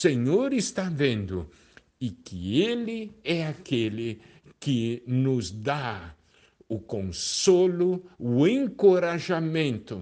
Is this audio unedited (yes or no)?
yes